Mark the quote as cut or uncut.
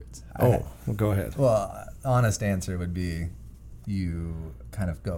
cut